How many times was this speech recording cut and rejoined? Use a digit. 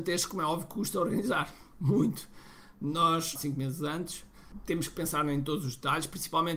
1